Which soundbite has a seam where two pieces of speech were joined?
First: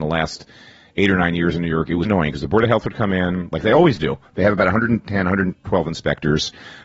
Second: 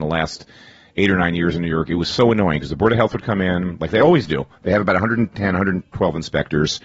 first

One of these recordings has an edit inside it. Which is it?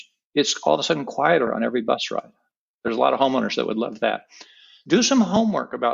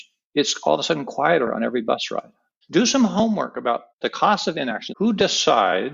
second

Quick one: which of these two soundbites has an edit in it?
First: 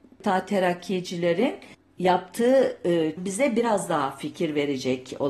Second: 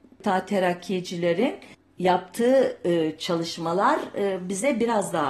first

